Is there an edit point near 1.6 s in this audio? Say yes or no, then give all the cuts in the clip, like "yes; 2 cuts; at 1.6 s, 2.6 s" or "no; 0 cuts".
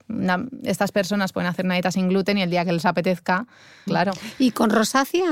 no; 1 cut; at 3.9 s